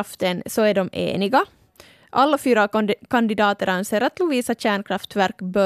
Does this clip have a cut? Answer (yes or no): no